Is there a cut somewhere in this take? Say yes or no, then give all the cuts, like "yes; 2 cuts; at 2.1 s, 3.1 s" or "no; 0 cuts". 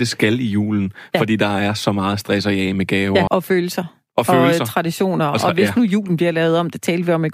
yes; 1 cut; at 3.3 s